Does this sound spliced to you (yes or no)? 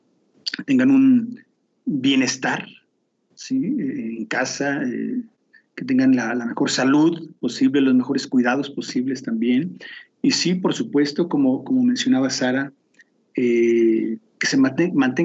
no